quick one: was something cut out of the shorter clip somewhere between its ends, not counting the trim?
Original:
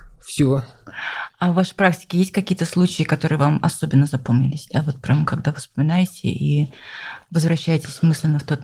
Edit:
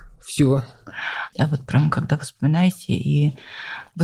yes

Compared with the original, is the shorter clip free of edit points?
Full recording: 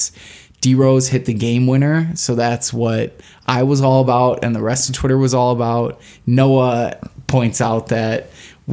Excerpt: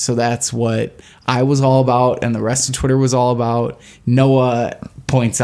yes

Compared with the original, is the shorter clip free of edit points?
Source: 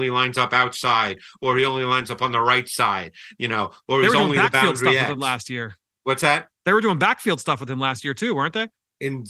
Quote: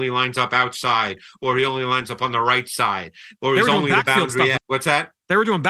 no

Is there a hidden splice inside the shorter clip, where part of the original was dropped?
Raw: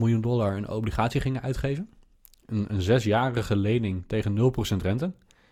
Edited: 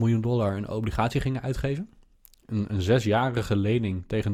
no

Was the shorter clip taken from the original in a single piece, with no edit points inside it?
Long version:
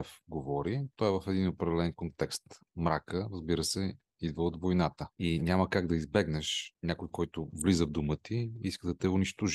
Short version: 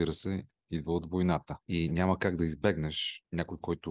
yes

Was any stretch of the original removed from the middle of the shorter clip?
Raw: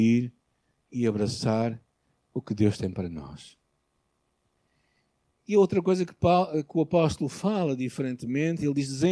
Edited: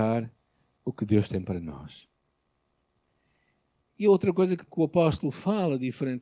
yes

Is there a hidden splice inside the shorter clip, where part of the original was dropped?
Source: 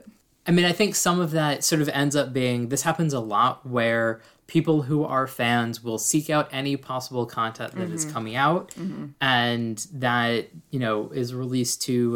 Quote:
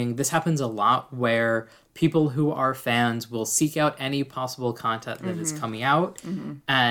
no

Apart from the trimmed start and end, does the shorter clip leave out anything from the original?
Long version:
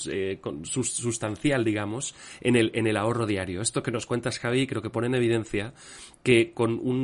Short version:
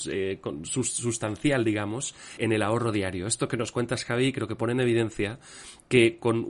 yes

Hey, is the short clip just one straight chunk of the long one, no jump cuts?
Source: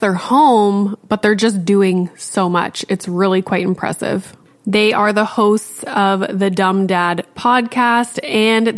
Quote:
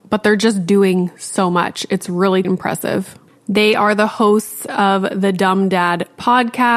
no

